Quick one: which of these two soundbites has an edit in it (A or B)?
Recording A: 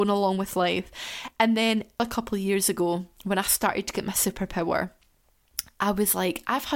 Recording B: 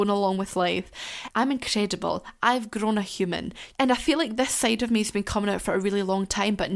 B